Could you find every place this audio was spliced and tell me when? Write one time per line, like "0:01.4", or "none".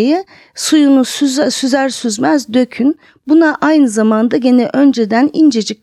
none